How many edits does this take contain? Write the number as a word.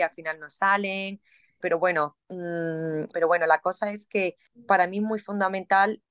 two